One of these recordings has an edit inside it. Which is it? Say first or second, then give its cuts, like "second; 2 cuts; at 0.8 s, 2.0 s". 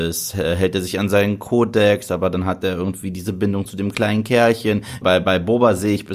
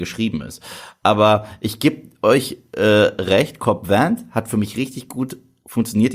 first; 1 cut; at 5.0 s